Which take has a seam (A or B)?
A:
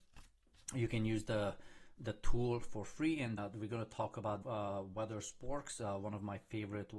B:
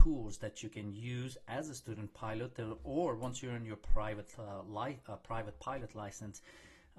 A